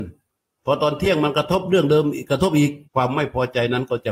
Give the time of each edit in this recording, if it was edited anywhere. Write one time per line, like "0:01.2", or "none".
0:02.8